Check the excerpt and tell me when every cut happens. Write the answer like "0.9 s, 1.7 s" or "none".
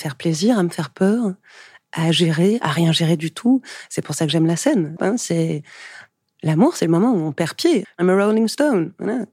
5.0 s, 7.8 s